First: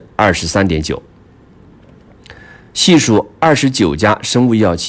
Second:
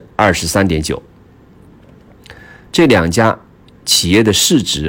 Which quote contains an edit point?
second; 1 cut; at 2.7 s

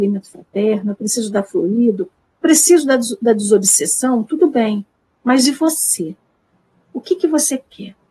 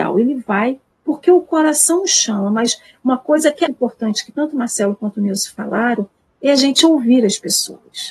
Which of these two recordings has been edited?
second; 1 cut; at 3.7 s

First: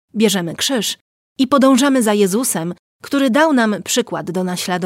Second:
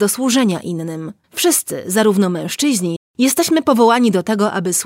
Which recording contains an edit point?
second; 2 cuts; at 1.2 s, 3.0 s

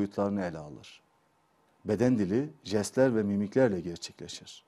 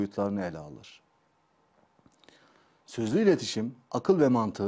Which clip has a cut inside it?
first; 1 cut; at 1.7 s

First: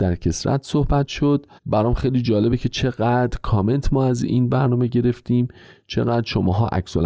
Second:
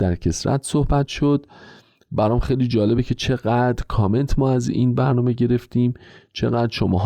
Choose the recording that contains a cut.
first; 1 cut; at 1.6 s

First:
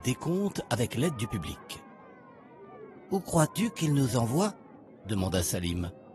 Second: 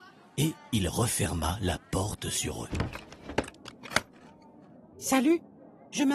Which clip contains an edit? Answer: second; 1 cut; at 4.9 s

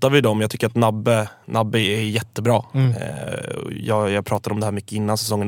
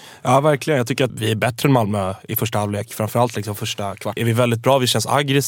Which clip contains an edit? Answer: second; 2 cuts; at 1.1 s, 4.2 s

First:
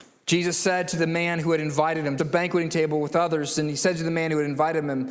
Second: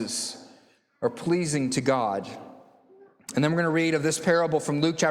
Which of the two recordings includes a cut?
first; 1 cut; at 2.2 s

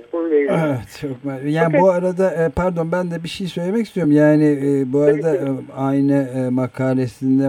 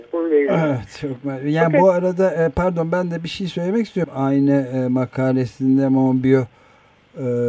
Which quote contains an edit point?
second; 1 cut; at 4.0 s

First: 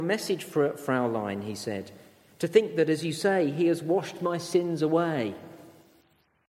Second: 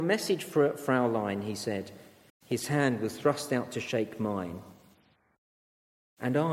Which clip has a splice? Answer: second; 1 cut; at 2.3 s

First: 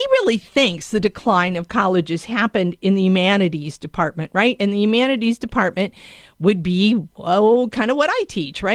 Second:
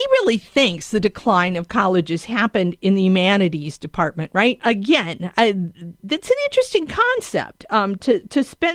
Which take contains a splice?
second; 1 cut; at 4.6 s

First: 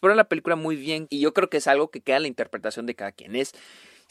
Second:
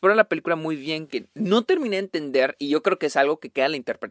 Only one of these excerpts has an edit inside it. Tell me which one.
first; 1 cut; at 1.1 s

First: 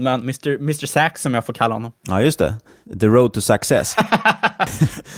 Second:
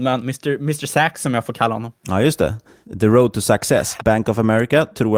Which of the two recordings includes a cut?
second; 1 cut; at 4.0 s

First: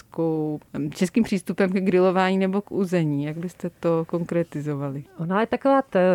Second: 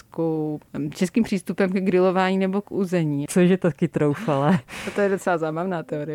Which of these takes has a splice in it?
second; 1 cut; at 3.3 s

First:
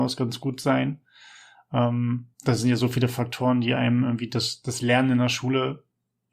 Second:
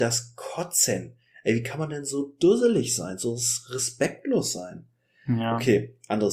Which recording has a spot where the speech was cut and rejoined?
first; 2 cuts; at 2.3 s, 4.6 s

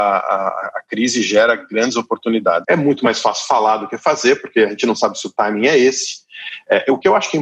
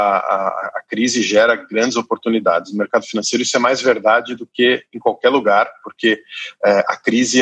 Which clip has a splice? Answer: first; 1 cut; at 2.6 s

